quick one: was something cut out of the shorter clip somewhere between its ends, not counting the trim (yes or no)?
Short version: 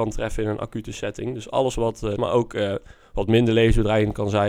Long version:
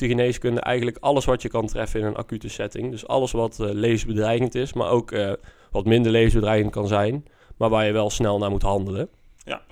yes